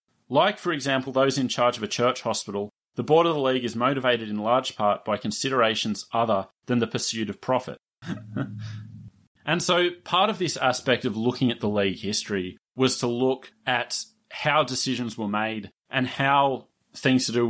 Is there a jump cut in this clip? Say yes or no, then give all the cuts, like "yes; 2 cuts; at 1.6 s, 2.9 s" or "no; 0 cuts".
yes; 1 cut; at 8.0 s